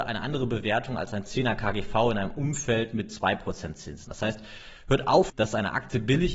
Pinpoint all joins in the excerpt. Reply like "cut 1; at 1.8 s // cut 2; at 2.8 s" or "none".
cut 1; at 4.0 s // cut 2; at 5.3 s